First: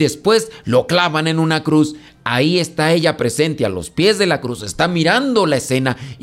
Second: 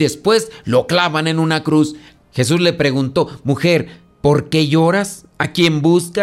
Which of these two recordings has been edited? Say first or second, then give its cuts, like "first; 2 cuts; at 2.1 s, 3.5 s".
second; 1 cut; at 2.2 s